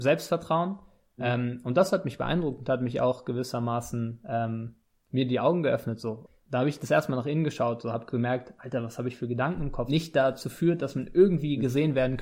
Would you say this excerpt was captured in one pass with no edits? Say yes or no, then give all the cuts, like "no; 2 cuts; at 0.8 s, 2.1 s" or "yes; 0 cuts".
no; 1 cut; at 9.9 s